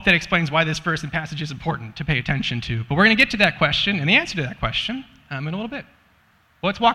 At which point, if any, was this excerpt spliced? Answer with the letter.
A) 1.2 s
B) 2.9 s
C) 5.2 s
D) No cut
D